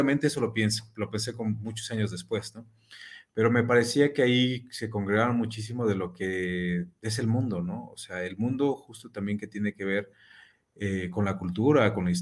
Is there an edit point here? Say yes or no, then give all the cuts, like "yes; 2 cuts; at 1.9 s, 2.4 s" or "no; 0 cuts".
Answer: no; 0 cuts